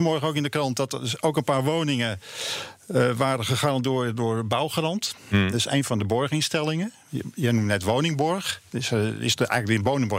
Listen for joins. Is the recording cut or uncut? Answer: uncut